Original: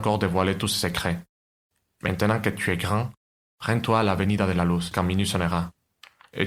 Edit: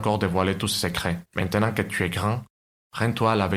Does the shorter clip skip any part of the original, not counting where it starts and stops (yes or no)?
yes